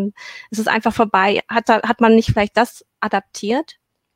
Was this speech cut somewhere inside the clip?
no; 0 cuts

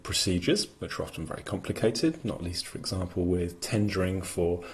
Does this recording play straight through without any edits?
yes; 0 cuts

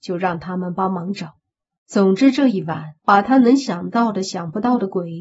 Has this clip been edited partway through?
yes; 2 cuts; at 1.8 s, 3.0 s

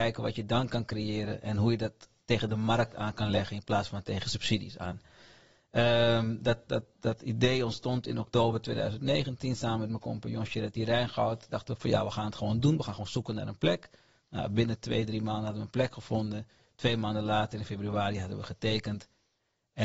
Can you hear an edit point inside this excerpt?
no; 0 cuts

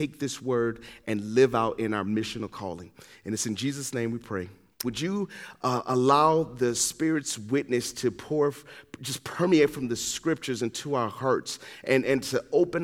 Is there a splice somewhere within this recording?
yes; 1 cut; at 4.8 s

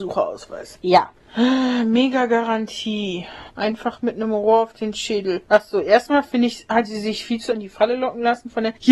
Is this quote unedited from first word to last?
no; 2 cuts; at 3.5 s, 7.5 s

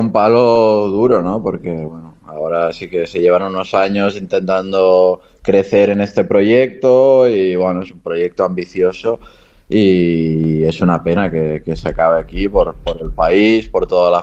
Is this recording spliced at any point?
no; 0 cuts

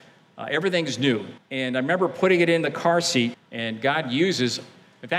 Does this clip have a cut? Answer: yes; 2 cuts; at 1.4 s, 3.3 s

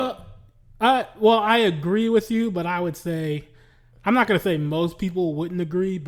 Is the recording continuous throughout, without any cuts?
yes; 0 cuts

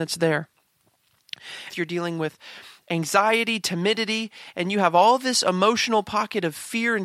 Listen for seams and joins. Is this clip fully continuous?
no; 1 cut; at 1.7 s

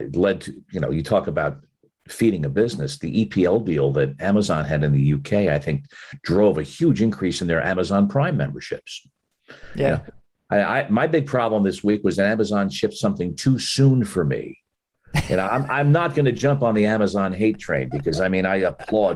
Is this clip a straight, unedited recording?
yes; 0 cuts

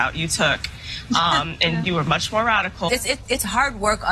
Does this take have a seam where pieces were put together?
yes; 2 cuts; at 1.8 s, 2.9 s

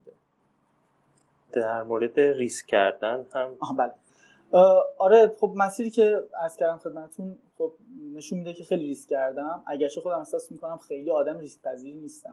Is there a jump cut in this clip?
no; 0 cuts

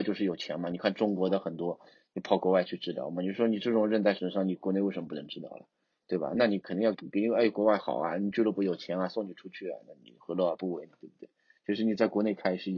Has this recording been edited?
yes; 1 cut; at 6.9 s

